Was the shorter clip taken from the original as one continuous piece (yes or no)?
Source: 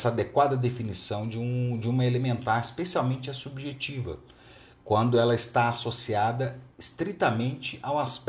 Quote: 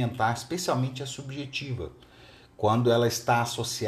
yes